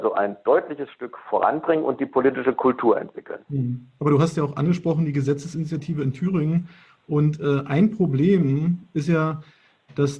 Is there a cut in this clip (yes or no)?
no